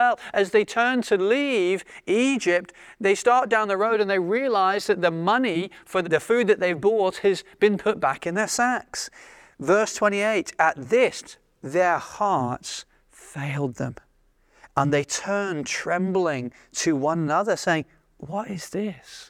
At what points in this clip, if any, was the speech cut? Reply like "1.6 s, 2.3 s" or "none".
6.0 s

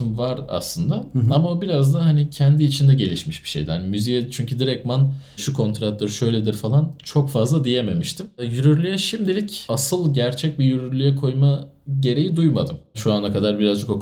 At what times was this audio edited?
none

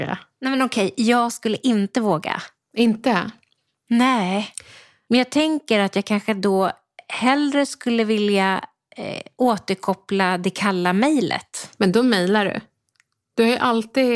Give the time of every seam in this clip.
none

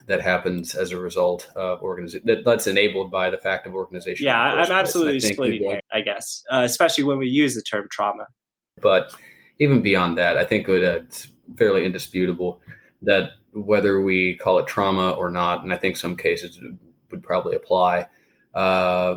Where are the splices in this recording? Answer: 5.8 s, 8.8 s

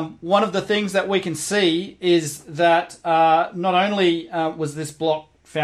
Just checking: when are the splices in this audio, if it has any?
none

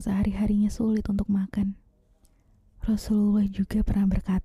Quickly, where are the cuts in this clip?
none

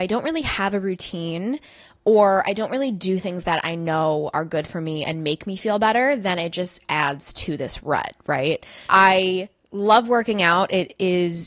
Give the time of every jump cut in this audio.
8.9 s

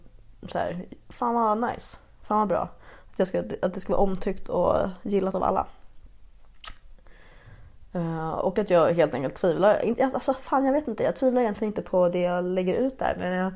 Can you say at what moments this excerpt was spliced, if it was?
none

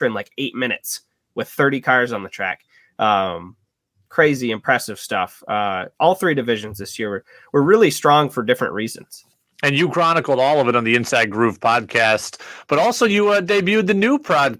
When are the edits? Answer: none

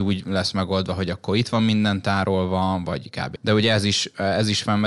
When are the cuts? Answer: 3.4 s

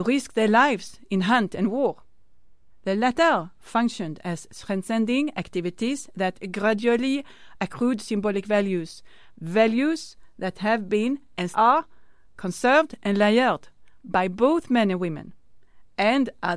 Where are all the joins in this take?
11.5 s

